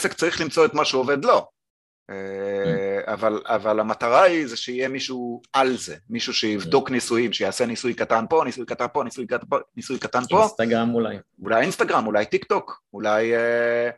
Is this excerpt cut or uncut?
cut